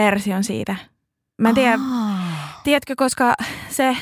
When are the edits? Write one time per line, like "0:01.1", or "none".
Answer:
none